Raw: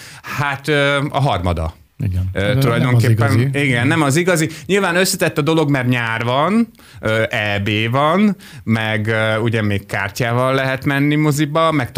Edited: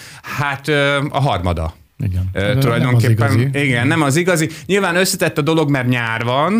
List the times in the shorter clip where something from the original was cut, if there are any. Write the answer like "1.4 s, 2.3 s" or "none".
none